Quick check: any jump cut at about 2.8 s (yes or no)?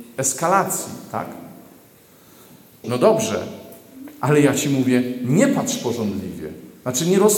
yes